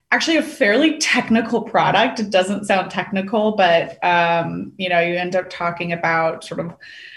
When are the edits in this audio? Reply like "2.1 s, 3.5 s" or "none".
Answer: none